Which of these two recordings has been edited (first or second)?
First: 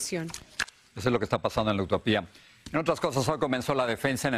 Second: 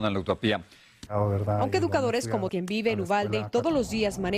second